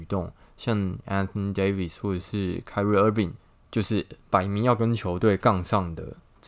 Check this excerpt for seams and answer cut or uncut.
uncut